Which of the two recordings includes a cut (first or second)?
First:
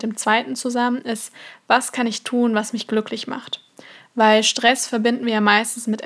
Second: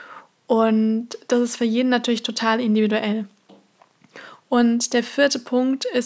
second